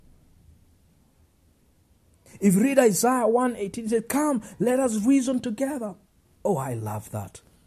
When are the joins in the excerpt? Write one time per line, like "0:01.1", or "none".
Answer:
0:06.2